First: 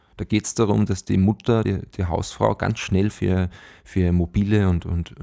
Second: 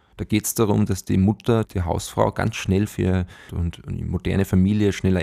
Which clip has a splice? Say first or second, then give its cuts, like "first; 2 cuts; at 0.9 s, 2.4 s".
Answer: second; 2 cuts; at 1.6 s, 3.5 s